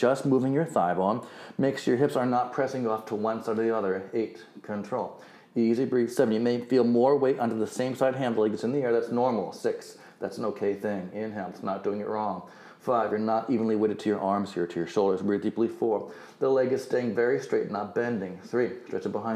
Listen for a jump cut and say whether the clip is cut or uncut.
uncut